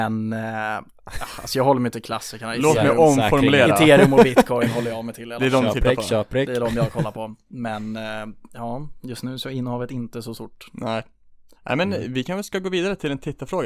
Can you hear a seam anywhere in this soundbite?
yes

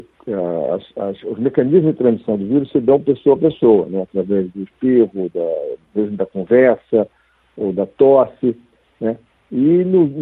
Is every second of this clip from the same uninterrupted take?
yes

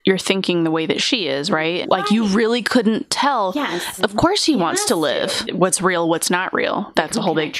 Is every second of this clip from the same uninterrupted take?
no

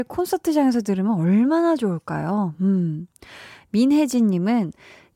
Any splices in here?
no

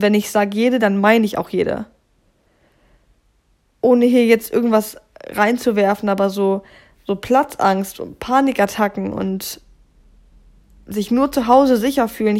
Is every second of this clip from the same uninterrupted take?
yes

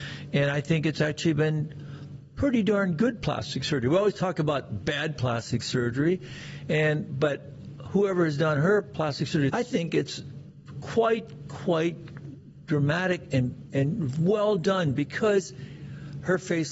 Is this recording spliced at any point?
yes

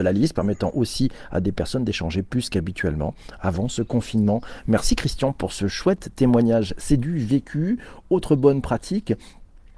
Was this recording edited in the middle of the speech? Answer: no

